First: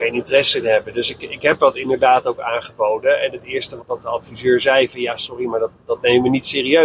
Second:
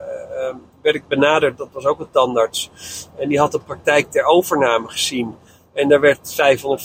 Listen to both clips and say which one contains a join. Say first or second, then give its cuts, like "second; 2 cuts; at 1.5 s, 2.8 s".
first; 1 cut; at 3.8 s